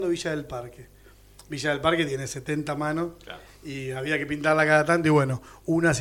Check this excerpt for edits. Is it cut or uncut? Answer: uncut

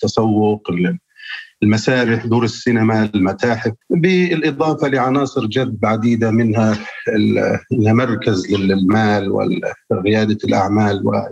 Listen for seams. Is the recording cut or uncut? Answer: cut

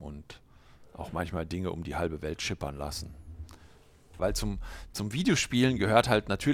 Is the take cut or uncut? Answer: cut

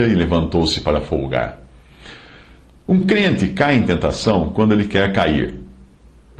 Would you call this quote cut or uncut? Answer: uncut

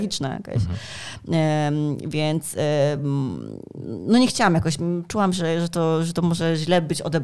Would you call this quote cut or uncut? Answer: uncut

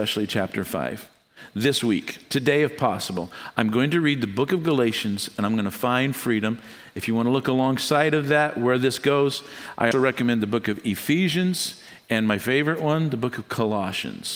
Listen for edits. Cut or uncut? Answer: cut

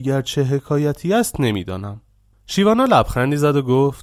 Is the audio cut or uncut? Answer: uncut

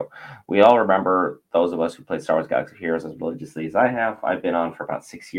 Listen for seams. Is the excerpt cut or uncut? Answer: uncut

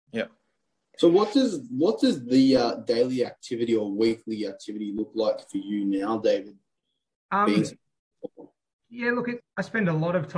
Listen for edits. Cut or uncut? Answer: cut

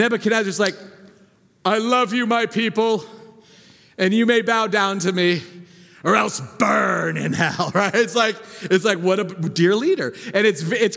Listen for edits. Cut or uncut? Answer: uncut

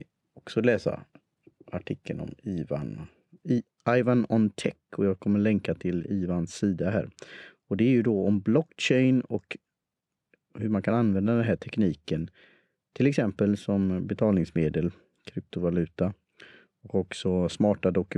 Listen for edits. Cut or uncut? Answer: uncut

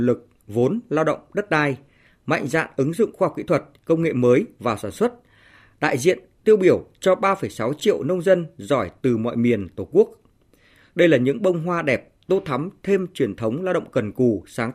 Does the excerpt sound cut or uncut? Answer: uncut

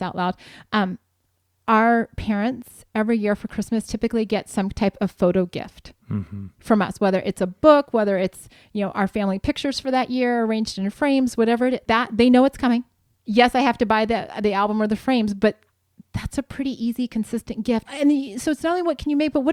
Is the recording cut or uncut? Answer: cut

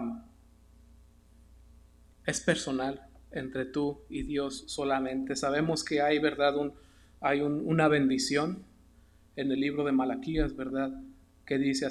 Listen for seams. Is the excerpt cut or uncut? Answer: uncut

